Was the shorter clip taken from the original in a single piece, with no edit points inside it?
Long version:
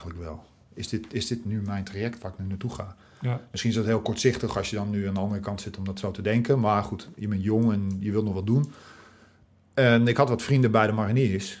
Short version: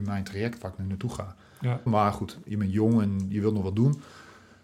no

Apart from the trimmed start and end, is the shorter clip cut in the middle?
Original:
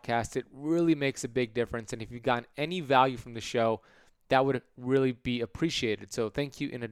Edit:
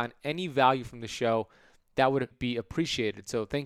yes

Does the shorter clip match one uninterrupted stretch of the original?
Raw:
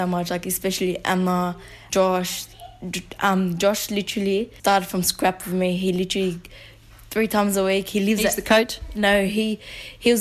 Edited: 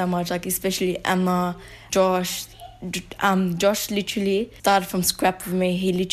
yes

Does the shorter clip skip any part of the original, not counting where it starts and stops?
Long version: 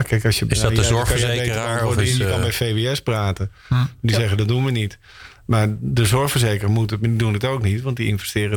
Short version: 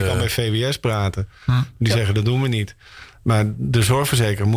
no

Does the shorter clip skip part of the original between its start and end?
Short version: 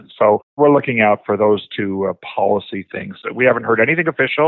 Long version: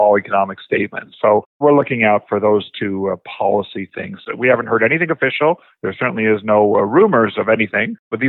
no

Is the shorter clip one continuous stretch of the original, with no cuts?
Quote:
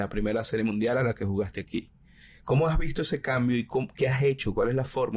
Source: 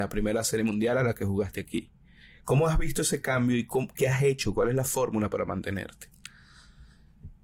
yes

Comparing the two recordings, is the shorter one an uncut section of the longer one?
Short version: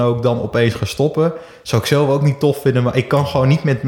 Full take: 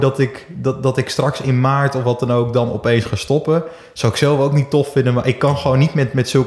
yes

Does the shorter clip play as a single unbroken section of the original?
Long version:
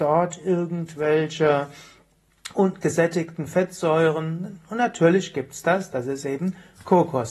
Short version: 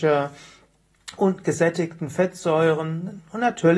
yes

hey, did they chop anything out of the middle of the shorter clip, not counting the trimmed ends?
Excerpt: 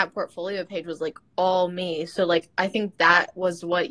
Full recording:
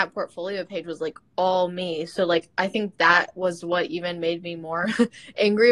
no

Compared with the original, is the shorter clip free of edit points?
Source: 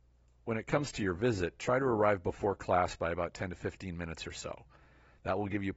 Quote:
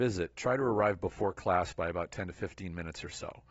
yes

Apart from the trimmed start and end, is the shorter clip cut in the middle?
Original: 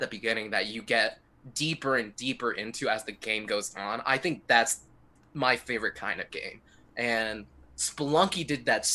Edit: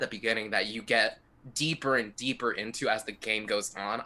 no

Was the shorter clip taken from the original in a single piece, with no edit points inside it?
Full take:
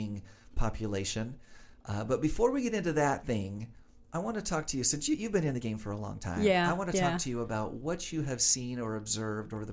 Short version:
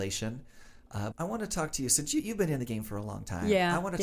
no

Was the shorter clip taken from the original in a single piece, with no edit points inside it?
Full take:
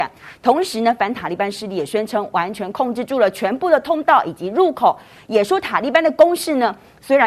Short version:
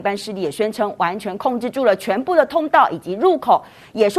yes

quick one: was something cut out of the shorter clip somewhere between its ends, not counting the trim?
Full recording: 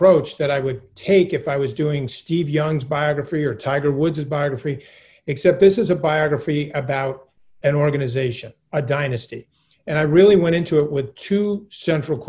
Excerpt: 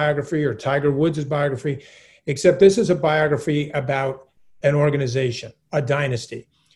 no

